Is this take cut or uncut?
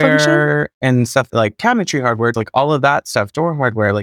cut